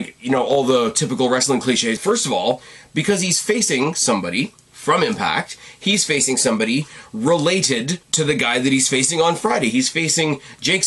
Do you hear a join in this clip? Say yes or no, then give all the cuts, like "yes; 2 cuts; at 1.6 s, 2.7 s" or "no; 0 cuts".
yes; 2 cuts; at 2.0 s, 8.0 s